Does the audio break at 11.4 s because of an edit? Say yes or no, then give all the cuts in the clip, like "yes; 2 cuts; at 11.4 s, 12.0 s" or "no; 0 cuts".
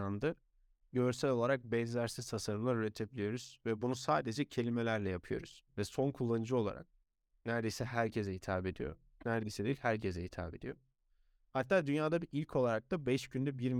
no; 1 cut; at 5.7 s